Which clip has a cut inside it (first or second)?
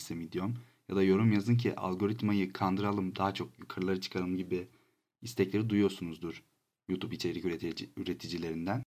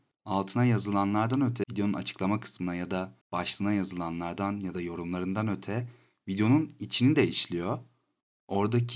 second